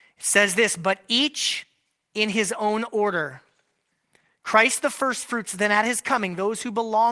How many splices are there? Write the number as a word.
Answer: zero